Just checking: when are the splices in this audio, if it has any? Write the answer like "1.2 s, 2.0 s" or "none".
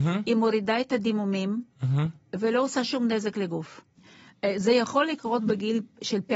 4.0 s